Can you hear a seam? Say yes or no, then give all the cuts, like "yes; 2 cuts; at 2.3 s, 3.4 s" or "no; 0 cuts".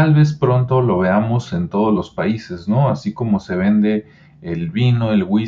no; 0 cuts